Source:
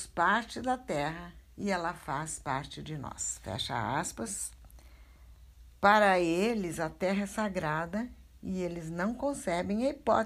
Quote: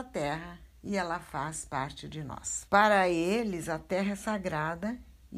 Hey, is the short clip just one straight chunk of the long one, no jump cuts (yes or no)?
no